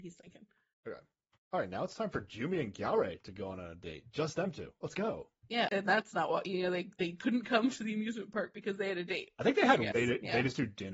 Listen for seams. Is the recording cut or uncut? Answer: cut